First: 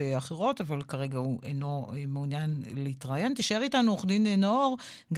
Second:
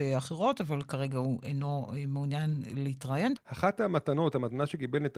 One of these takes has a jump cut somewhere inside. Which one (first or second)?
second